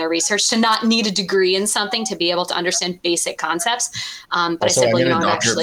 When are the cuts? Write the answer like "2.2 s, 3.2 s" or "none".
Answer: none

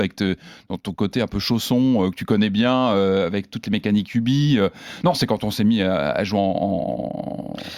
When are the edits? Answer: none

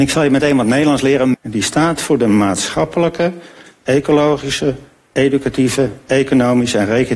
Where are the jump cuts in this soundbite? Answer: 1.3 s

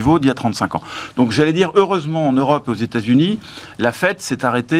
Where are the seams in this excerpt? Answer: none

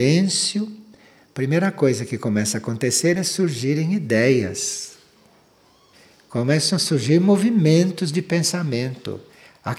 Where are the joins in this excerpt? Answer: none

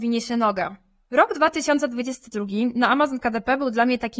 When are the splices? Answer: none

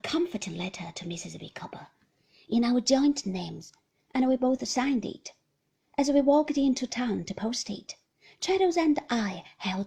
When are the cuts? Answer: none

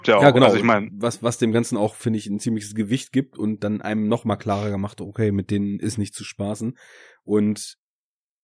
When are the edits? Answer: none

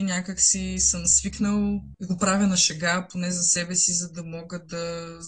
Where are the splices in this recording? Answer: none

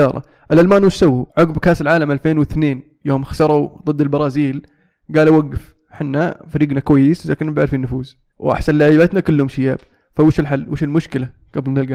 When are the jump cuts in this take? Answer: 1.3 s, 8.3 s

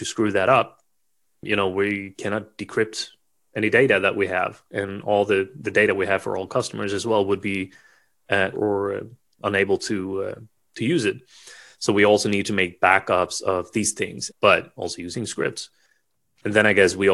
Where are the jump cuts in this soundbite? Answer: 8.5 s, 14.3 s

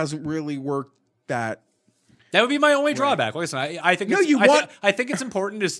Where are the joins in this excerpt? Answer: none

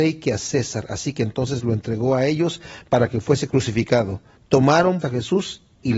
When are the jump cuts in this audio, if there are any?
5.0 s

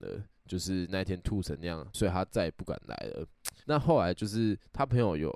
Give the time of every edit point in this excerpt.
1.9 s, 3.6 s

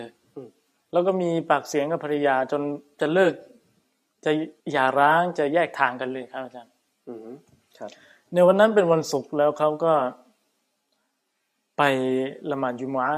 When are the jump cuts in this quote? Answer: 4.6 s

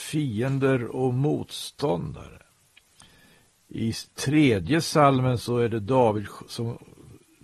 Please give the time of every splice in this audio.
none

